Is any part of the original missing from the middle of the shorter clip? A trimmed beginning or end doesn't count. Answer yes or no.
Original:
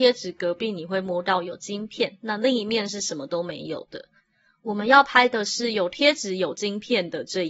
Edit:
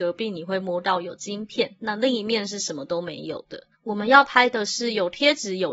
yes